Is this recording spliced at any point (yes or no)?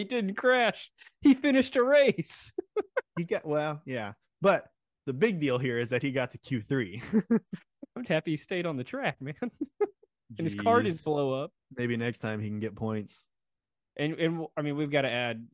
yes